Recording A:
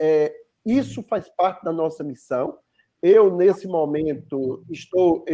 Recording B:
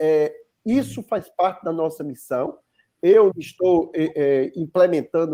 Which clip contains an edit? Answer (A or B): B